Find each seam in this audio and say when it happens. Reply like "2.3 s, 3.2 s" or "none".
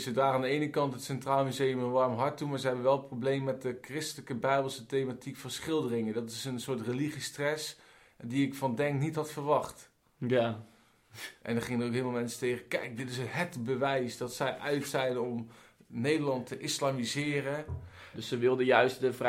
18.1 s